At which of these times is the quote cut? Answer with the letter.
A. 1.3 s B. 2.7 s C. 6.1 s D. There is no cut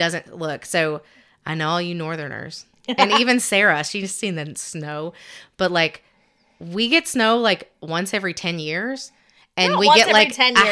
D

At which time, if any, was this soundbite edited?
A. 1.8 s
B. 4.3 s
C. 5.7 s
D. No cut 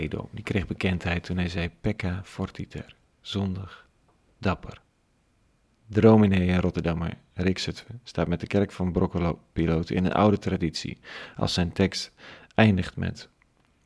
C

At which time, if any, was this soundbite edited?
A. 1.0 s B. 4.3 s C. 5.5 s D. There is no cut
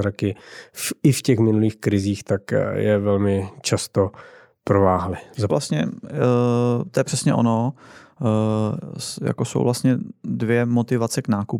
C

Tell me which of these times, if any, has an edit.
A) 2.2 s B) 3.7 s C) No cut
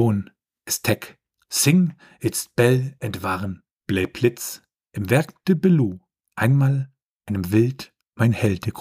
B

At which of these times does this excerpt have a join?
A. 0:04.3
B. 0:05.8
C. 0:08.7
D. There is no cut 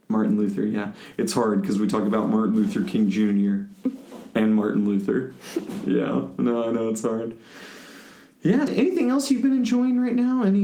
C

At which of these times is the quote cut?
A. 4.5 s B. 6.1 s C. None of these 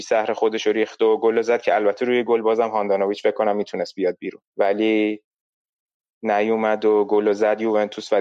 A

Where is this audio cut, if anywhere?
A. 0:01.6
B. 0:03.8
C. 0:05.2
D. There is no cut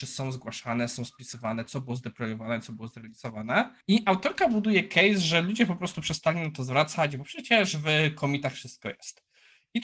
B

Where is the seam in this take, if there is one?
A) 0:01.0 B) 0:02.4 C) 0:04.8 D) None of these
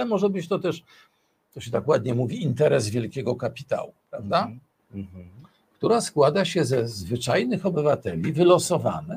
C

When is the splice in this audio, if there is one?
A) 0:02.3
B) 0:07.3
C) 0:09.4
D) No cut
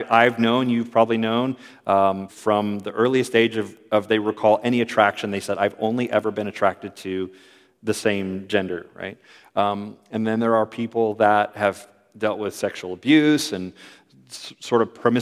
A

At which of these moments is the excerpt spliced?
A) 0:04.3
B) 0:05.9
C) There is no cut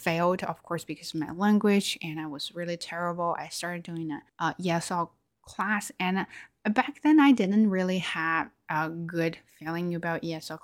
A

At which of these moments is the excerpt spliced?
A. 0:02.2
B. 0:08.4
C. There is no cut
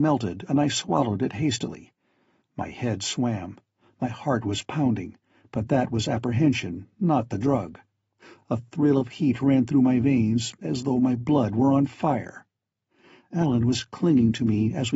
C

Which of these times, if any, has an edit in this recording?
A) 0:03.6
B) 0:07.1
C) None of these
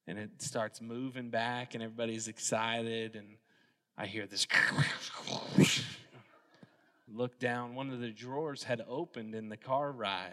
B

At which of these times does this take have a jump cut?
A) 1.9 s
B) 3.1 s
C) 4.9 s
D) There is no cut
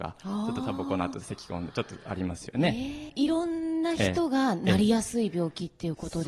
B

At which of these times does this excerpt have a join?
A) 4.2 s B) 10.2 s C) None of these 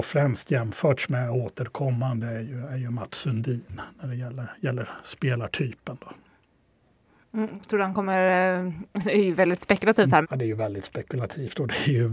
B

